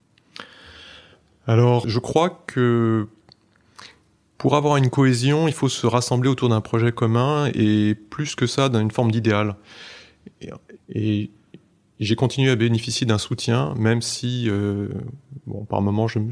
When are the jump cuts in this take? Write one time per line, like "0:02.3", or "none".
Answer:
0:01.8
0:10.8